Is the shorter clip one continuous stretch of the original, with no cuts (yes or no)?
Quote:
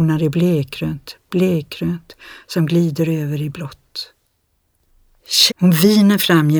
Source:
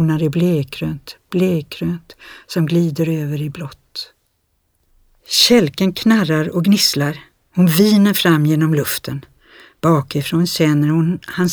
no